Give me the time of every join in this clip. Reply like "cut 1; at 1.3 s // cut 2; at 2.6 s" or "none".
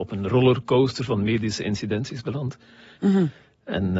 cut 1; at 3.0 s